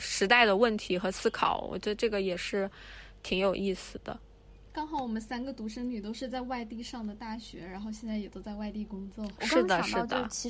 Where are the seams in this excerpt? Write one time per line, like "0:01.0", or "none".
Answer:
0:09.4